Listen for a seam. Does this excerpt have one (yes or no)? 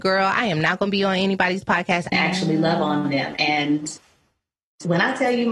yes